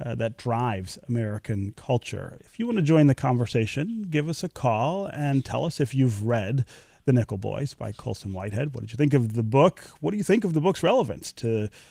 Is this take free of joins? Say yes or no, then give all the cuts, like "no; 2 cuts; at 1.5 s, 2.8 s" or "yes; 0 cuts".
yes; 0 cuts